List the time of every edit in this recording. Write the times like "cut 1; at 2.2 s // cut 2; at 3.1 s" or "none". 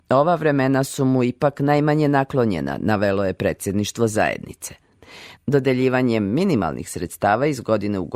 cut 1; at 5.4 s